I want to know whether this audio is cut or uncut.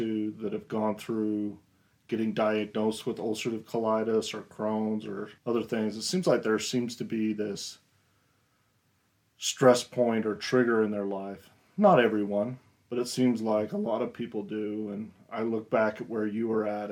cut